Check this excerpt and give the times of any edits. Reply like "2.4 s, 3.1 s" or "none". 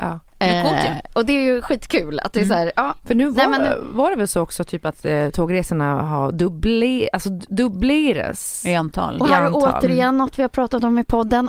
none